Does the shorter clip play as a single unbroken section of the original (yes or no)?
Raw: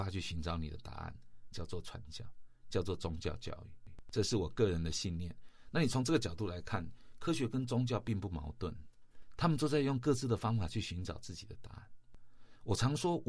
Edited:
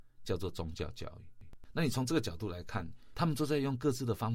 no